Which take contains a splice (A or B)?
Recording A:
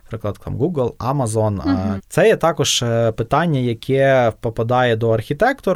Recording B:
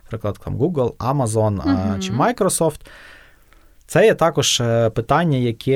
A